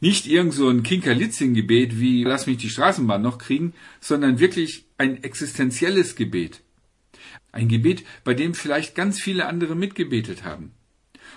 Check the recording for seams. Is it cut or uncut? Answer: cut